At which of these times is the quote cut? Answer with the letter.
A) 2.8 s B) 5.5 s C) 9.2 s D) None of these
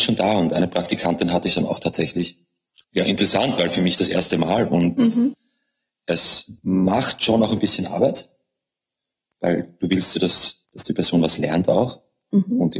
A